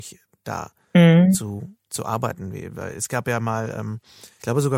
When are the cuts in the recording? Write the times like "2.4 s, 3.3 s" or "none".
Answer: none